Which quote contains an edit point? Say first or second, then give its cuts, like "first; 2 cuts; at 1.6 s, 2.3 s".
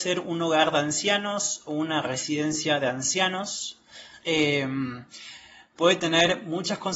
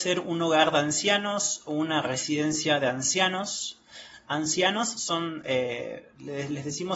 first; 1 cut; at 4.2 s